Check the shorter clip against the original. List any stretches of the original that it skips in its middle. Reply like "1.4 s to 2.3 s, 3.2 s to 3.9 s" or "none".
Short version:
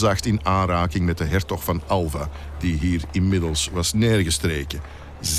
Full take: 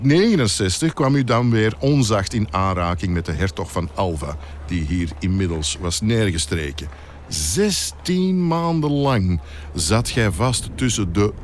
none